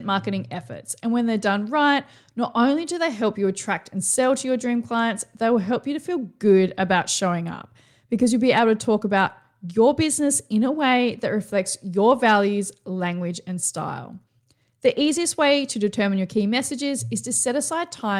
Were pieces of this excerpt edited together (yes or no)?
no